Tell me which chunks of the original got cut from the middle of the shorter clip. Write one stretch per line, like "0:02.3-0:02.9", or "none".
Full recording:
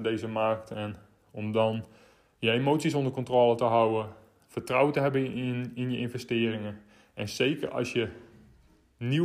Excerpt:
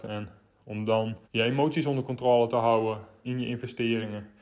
0:01.9-0:02.3
0:04.3-0:05.7